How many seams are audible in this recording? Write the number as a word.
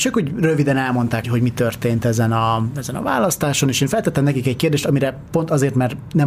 one